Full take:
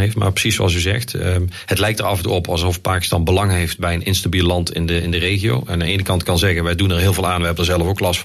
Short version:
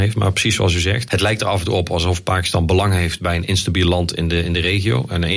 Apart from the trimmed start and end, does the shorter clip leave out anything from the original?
yes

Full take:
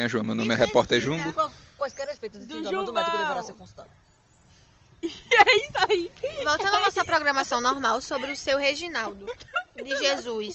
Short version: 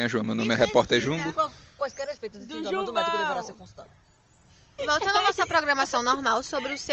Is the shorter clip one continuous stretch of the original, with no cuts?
no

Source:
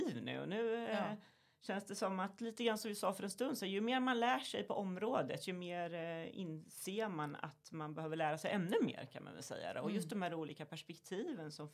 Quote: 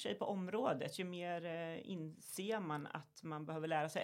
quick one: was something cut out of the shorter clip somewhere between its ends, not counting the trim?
no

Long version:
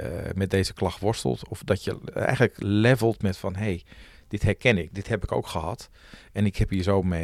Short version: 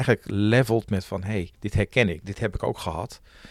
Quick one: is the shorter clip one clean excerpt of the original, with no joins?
no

